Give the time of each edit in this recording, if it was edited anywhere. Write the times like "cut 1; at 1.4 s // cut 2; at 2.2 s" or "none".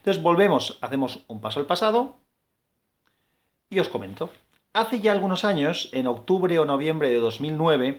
none